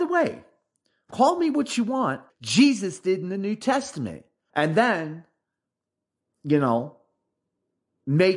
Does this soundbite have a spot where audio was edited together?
yes; 2 cuts; at 2.3 s, 4.5 s

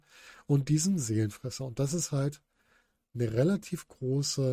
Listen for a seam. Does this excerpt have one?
no; 0 cuts

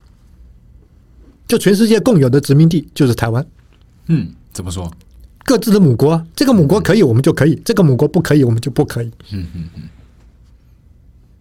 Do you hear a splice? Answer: yes; 1 cut; at 5.4 s

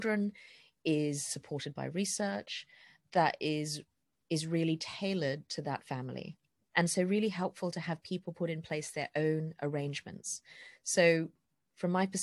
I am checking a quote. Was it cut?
yes; 1 cut; at 6.7 s

